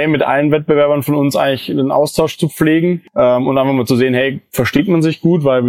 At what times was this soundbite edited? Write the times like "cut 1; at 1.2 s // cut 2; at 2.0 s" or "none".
none